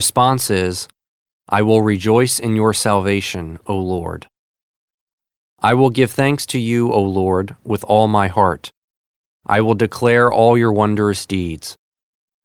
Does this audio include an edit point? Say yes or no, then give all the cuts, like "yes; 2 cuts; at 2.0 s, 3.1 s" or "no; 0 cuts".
no; 0 cuts